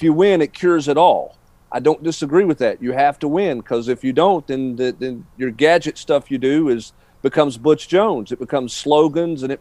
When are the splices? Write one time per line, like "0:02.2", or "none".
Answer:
none